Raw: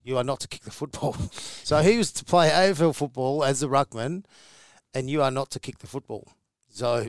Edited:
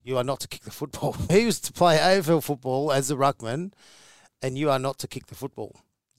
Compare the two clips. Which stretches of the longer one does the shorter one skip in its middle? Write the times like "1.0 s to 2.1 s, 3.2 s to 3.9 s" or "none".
1.3 s to 1.8 s

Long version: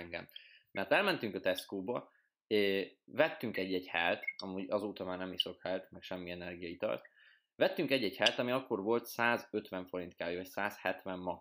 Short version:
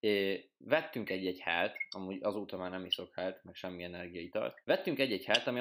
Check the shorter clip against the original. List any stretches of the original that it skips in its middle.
7.1 s to 7.5 s

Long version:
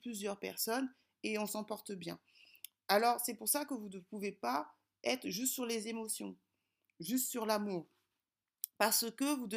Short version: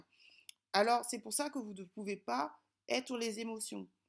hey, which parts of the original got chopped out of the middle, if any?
5.2 s to 5.6 s

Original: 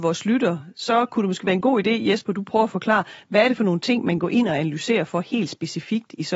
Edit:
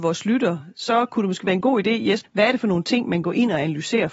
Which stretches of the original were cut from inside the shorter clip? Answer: 2.2 s to 3.2 s

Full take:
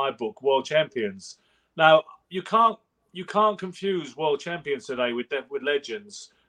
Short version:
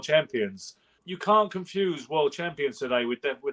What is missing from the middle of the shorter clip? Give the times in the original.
1.6 s to 3.0 s

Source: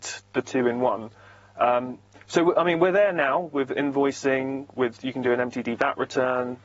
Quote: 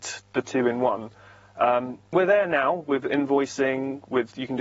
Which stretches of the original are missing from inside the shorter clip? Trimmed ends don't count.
2.1 s to 2.8 s

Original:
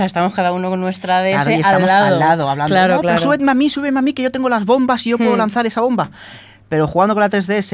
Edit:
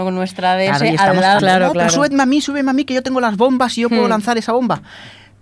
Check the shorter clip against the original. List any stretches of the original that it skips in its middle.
2.0 s to 2.7 s

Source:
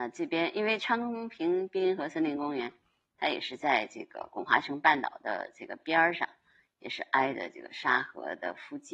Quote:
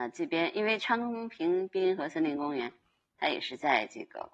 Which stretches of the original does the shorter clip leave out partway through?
none

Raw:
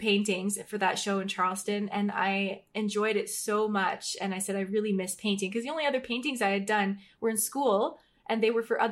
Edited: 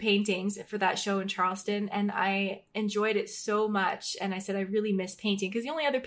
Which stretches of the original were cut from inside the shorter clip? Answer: none

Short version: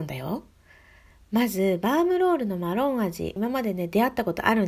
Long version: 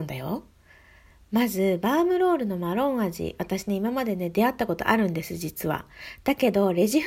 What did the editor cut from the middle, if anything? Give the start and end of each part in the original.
3.4 s to 3.8 s

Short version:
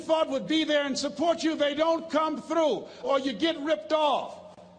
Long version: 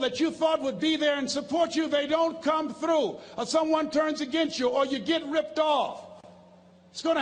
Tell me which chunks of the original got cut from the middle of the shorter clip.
3.4 s to 4.7 s

